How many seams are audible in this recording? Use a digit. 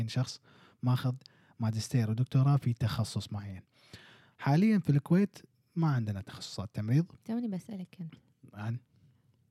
0